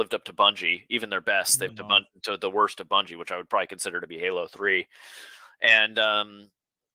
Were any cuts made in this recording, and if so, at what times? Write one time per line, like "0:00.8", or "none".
0:01.7